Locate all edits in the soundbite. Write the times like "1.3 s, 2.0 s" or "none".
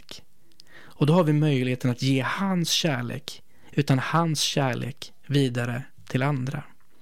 3.7 s